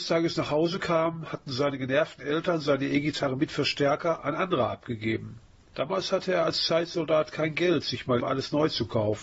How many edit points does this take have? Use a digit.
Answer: 1